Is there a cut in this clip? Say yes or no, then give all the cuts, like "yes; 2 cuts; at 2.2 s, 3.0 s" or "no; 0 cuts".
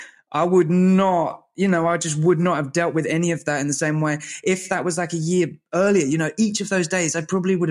no; 0 cuts